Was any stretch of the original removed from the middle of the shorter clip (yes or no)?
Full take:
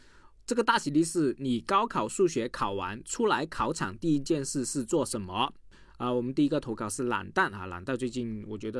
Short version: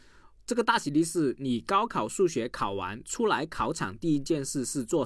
no